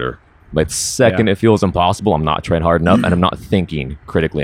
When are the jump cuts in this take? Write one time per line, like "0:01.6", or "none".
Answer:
none